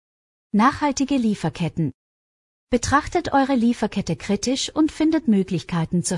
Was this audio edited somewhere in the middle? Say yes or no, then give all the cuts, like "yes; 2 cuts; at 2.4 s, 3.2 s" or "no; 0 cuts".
no; 0 cuts